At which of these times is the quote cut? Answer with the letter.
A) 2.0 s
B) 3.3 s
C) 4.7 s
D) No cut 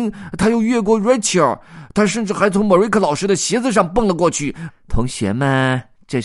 C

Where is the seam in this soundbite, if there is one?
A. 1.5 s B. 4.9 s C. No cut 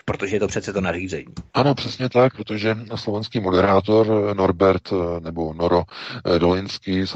A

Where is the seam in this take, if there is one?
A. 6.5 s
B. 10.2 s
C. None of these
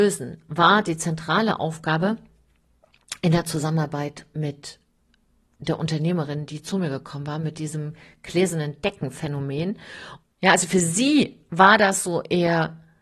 B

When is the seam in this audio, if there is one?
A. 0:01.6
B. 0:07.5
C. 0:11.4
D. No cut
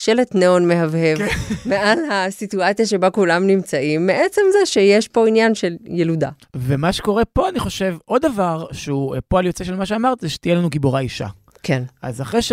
D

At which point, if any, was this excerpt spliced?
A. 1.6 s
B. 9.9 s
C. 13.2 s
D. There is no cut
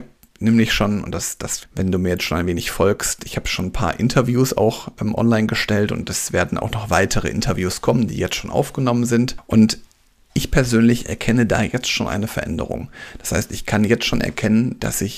A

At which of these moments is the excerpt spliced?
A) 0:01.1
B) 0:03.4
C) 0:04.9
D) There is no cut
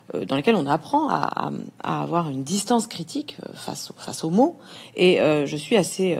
D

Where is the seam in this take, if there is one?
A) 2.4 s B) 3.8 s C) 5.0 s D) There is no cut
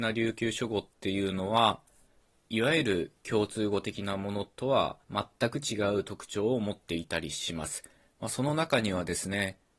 C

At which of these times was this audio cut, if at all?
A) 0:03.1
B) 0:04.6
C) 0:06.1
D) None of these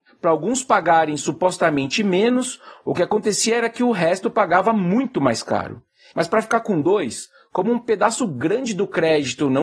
C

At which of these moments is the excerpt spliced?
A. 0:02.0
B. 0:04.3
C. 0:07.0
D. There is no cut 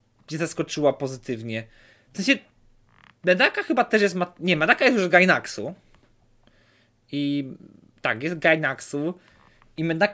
D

